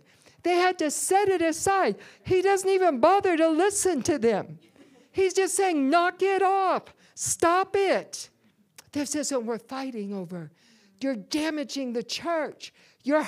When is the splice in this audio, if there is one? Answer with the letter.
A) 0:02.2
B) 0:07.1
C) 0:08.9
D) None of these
A